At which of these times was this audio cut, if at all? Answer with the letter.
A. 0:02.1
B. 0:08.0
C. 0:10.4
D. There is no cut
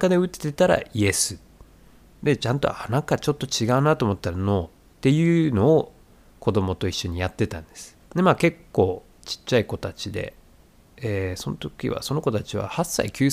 B